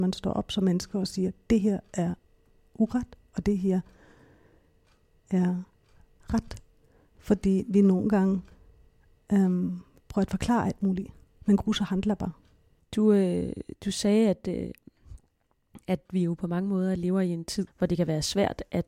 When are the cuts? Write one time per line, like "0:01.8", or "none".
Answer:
0:12.8
0:17.7